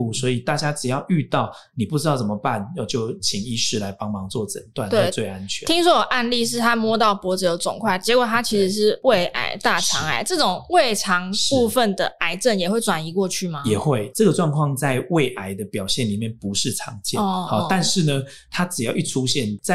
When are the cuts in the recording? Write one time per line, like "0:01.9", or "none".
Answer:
0:14.1